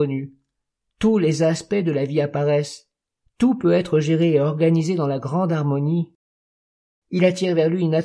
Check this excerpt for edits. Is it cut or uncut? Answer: cut